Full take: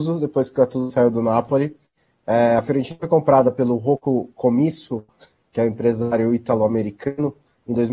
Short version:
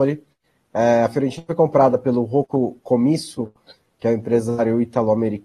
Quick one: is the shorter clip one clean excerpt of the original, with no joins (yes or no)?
yes